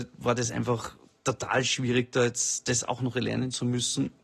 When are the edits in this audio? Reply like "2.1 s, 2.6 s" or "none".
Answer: none